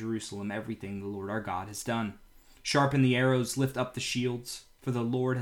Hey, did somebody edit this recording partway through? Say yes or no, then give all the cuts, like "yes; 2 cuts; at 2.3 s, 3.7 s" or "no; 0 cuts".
no; 0 cuts